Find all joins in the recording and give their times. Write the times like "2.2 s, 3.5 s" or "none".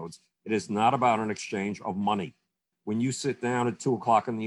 2.7 s